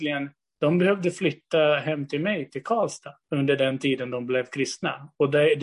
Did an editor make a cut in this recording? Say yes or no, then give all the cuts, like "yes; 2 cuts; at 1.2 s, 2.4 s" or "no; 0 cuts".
yes; 1 cut; at 3.2 s